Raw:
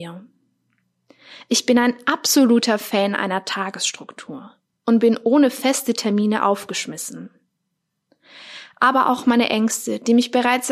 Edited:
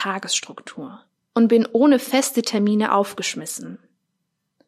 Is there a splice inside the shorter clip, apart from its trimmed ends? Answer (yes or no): no